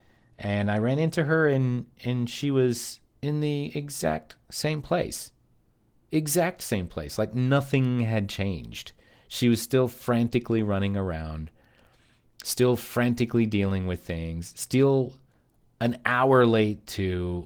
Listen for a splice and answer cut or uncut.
uncut